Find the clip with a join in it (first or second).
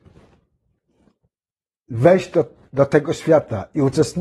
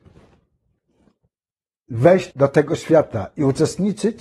second